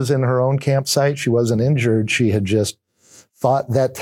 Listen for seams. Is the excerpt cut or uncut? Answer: uncut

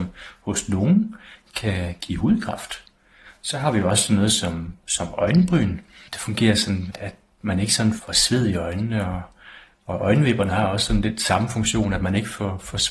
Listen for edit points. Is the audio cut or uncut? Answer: uncut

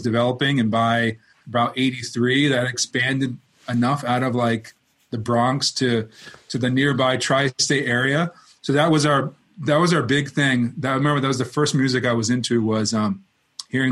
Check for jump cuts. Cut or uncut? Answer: uncut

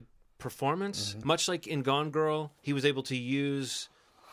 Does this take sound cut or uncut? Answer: cut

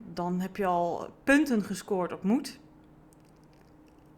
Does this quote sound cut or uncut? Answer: uncut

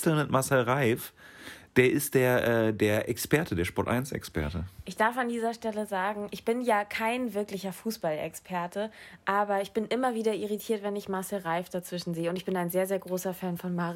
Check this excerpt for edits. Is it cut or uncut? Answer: uncut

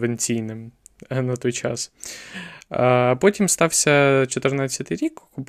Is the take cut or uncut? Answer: uncut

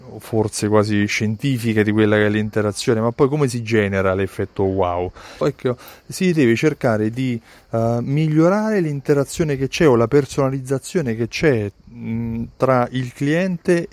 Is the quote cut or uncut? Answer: cut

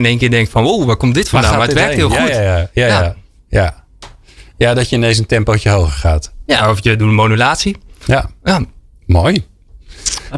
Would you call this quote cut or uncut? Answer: uncut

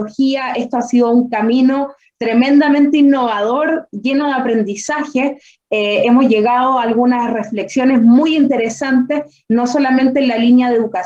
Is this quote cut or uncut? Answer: uncut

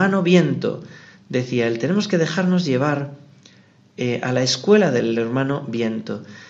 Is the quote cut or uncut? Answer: uncut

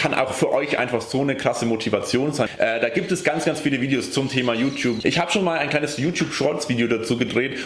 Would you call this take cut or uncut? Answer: cut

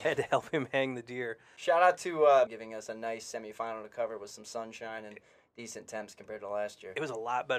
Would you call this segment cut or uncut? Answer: cut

